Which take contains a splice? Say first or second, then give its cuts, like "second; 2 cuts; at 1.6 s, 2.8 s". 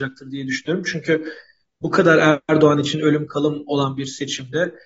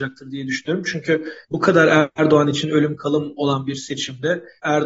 second; 1 cut; at 1.4 s